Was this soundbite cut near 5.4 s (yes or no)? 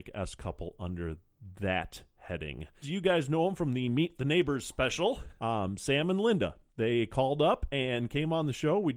yes